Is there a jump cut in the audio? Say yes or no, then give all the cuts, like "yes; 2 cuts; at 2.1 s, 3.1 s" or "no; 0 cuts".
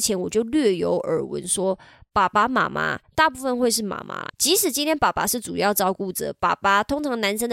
no; 0 cuts